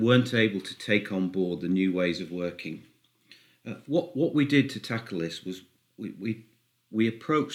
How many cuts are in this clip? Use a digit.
0